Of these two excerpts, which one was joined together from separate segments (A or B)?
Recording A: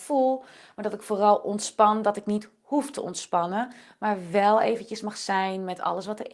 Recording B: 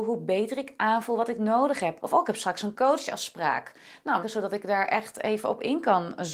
B